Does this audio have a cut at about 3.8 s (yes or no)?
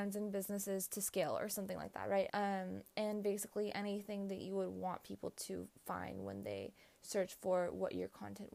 no